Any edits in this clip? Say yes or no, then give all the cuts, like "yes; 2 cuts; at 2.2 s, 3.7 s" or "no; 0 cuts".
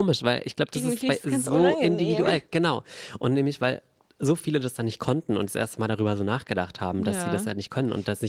no; 0 cuts